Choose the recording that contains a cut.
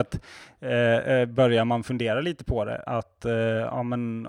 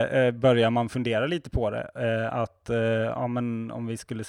first; 1 cut; at 2.9 s

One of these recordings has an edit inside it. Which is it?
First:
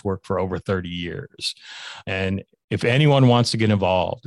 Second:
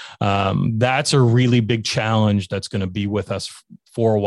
first; 1 cut; at 2.0 s

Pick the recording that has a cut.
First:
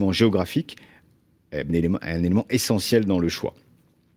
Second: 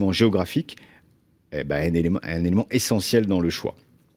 first; 1 cut; at 1.7 s

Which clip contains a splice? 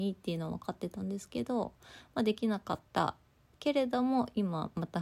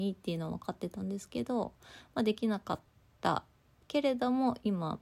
first; 1 cut; at 2.9 s

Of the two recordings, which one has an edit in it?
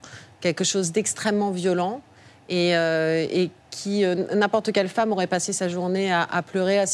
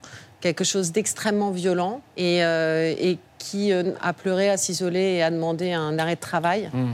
second; 2 cuts; at 2.1 s, 3.9 s

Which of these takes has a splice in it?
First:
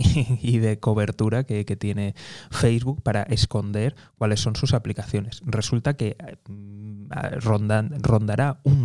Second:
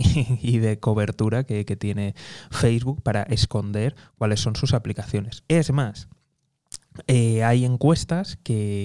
second; 1 cut; at 5.4 s

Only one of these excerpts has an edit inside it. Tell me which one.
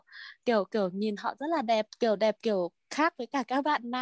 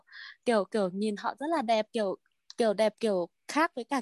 first; 1 cut; at 1.9 s

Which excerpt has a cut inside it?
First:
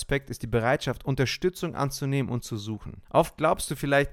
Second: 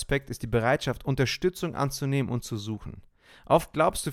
first; 1 cut; at 3.0 s

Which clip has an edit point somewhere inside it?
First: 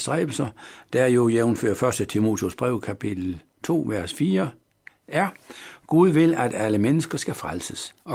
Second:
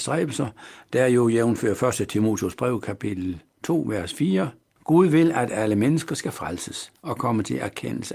second; 1 cut; at 4.8 s

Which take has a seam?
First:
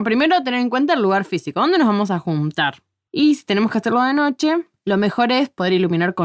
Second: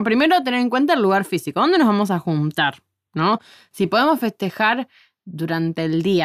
first; 1 cut; at 3.1 s

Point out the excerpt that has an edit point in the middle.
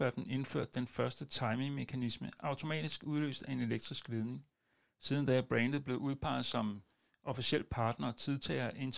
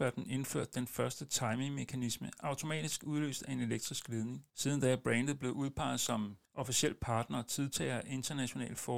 second; 2 cuts; at 4.5 s, 6.4 s

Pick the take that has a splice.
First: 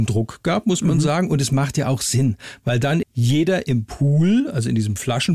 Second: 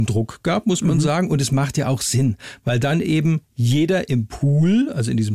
first; 1 cut; at 3.0 s

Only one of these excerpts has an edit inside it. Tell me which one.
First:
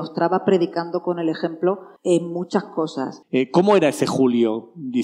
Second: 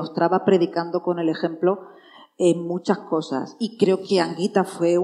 first; 2 cuts; at 2.0 s, 3.2 s

